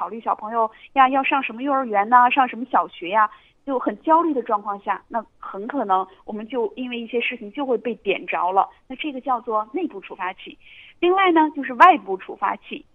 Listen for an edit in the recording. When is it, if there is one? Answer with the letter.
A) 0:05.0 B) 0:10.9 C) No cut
C